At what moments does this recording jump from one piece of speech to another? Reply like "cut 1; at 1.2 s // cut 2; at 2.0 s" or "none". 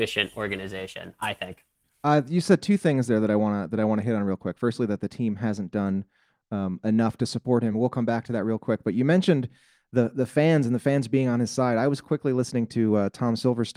none